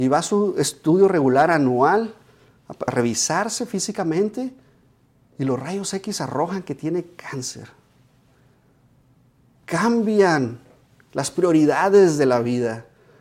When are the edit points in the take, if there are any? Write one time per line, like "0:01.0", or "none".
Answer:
0:02.9